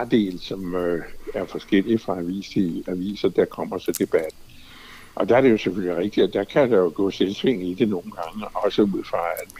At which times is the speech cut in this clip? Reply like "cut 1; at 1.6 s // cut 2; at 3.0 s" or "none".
none